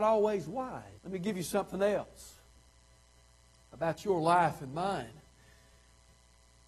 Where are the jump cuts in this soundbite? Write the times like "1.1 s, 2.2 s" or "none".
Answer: 1.0 s